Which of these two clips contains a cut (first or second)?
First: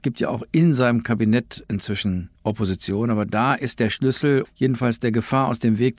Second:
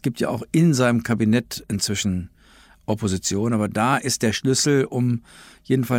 first